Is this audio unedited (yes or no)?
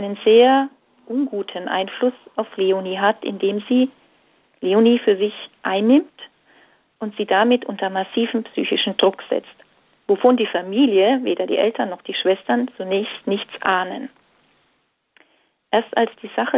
yes